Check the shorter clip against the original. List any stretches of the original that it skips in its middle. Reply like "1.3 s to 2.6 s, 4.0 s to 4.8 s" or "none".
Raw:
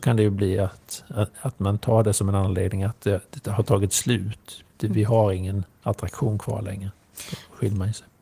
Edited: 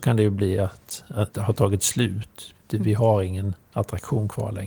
1.3 s to 3.4 s